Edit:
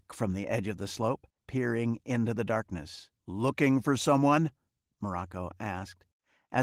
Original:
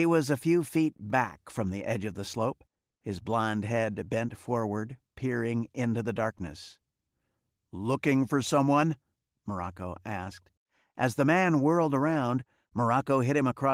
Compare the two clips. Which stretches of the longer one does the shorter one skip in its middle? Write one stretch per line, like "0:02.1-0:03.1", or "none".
0:02.8-0:05.1
0:06.9-0:07.6